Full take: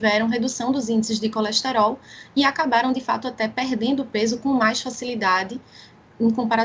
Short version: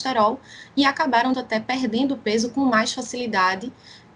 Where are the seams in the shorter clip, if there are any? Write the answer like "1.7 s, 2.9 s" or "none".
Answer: 1.3 s

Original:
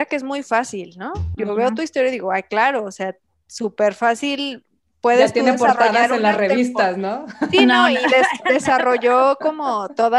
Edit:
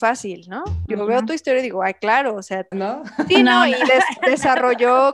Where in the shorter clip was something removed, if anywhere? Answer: 2.7 s

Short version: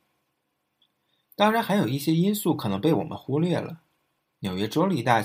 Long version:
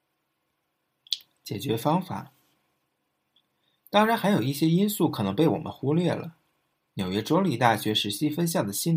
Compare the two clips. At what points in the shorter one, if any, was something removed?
none

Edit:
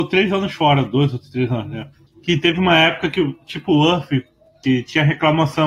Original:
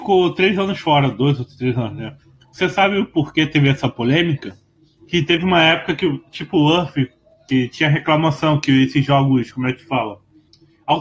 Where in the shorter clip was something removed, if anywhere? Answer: 2.1 s

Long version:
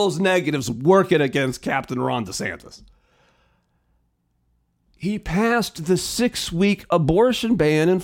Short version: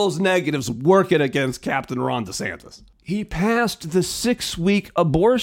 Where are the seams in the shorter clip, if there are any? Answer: 2.9 s

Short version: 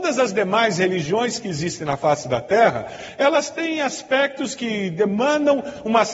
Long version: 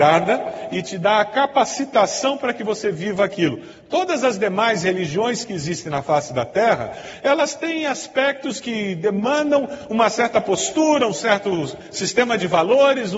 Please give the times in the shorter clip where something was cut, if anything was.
none

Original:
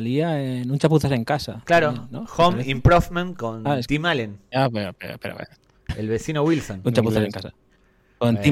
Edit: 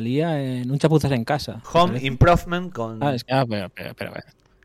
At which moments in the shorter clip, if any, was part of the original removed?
1.6 s, 3.2 s

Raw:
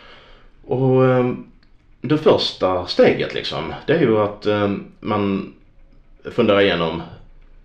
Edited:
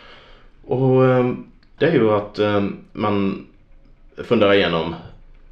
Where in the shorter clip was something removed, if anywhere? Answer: 1.8 s

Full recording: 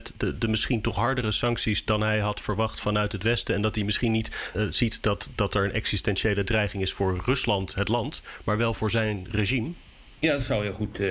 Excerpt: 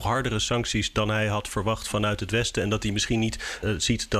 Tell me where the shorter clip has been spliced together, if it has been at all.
none

